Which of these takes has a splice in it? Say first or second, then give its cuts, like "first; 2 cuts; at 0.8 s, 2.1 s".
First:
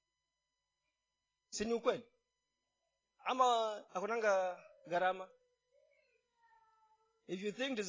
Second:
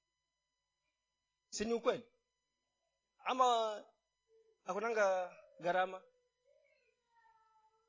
first; 1 cut; at 3.9 s